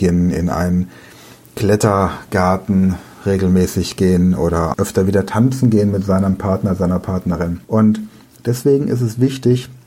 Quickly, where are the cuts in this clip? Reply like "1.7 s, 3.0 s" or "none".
4.7 s, 7.6 s